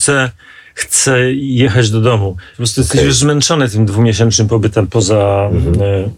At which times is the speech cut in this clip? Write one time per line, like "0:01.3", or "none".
0:02.5
0:04.9